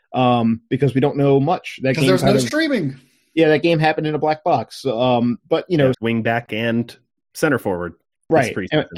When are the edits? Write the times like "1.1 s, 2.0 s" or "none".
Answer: 5.9 s